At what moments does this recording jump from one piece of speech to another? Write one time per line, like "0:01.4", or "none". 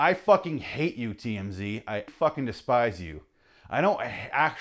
0:02.1